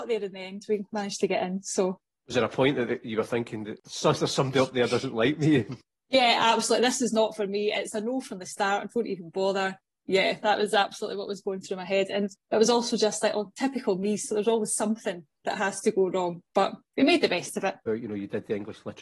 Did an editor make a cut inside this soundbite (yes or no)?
yes